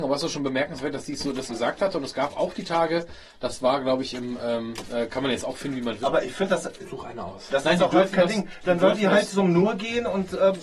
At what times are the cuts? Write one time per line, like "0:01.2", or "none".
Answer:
0:01.5
0:06.0